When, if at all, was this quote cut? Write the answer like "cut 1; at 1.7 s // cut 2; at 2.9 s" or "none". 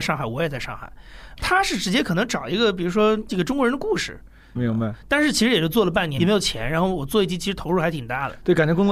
cut 1; at 1.4 s // cut 2; at 4.5 s // cut 3; at 6.2 s